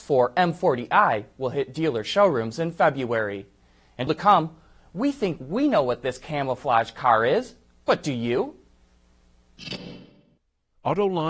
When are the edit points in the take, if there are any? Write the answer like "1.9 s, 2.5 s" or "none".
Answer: 4.1 s